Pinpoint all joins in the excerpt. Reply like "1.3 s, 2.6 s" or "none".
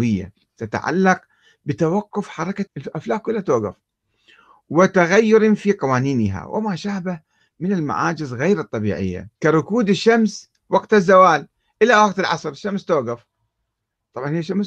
2.7 s, 9.4 s